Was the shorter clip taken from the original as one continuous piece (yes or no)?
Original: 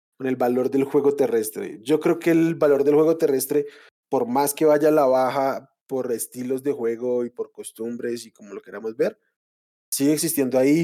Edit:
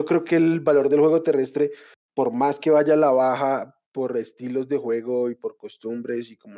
yes